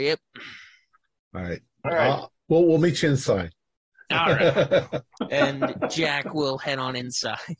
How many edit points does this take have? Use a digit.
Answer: 1